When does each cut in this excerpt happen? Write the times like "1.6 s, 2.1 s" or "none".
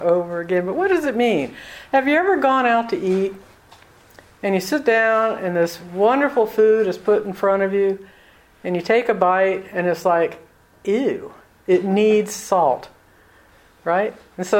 none